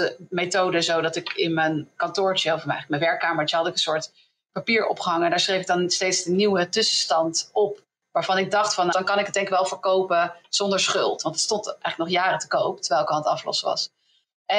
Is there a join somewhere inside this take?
yes; 1 cut; at 8.9 s

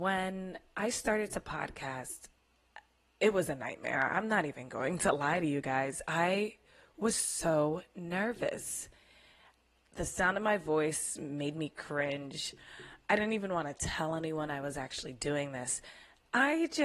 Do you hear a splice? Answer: no; 0 cuts

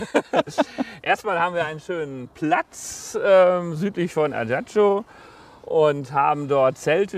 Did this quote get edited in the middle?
no; 0 cuts

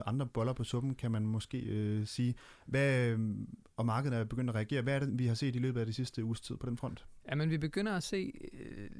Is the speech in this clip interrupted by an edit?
no; 0 cuts

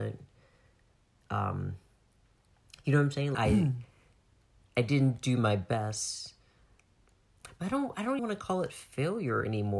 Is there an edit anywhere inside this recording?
yes; 2 cuts; at 3.3 s, 8.2 s

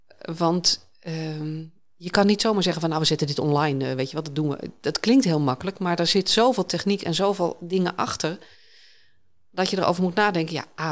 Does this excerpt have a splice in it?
no; 0 cuts

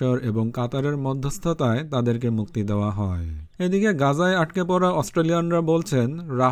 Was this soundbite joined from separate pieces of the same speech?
yes; 1 cut; at 3.5 s

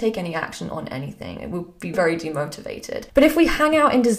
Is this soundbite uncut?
no; 1 cut; at 1.9 s

